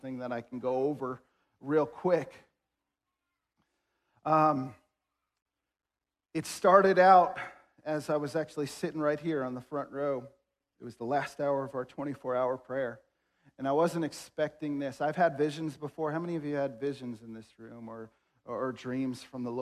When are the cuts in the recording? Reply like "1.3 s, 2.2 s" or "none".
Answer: none